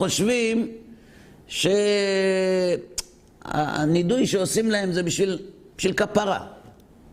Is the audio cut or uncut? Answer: uncut